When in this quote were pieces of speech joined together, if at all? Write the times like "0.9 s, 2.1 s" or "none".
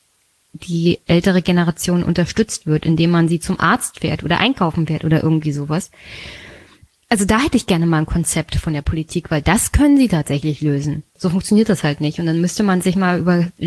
11.2 s